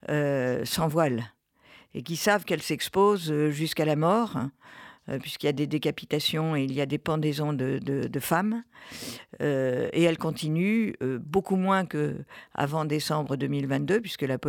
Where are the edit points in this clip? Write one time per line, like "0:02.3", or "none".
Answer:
none